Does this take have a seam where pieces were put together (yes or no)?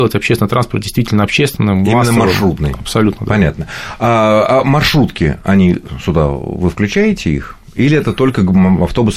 no